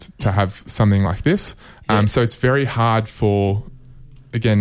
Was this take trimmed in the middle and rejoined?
no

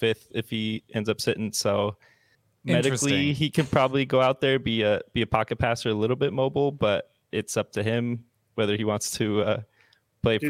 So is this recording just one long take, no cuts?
yes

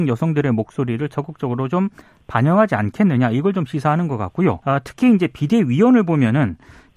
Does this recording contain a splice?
yes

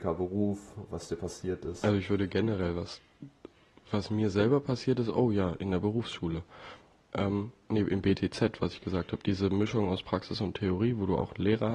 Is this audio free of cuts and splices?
yes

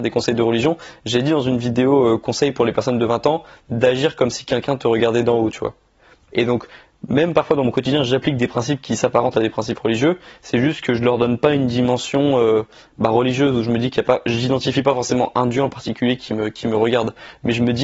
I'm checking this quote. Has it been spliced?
yes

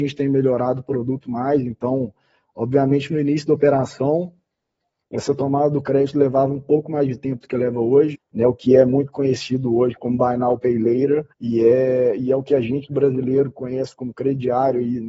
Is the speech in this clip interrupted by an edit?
yes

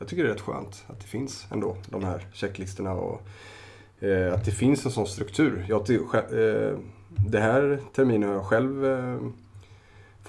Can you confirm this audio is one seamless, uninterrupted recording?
yes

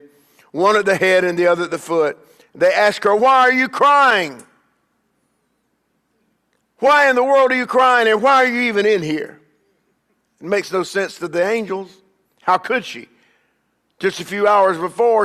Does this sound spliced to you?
yes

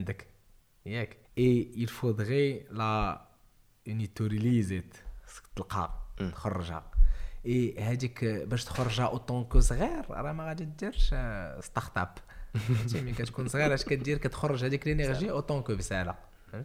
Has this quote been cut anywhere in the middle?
yes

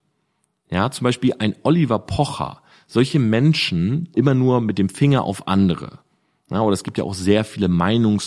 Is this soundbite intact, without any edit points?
no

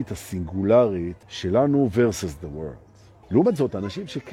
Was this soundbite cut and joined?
yes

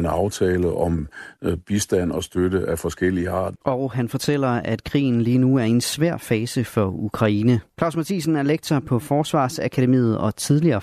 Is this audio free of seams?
no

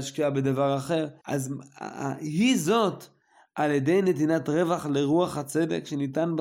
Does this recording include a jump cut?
yes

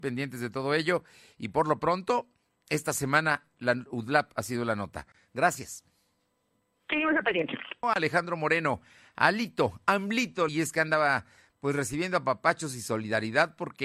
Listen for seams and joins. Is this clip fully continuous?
no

